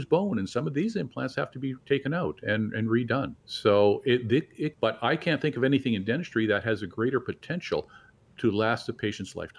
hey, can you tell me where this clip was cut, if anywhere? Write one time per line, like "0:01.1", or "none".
0:03.4
0:04.7